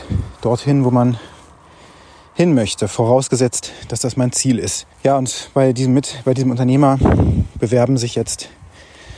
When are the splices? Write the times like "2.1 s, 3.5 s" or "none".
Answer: 4.9 s